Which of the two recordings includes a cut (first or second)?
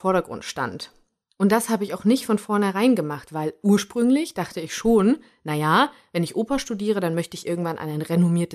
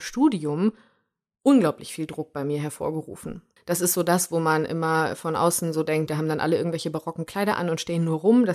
second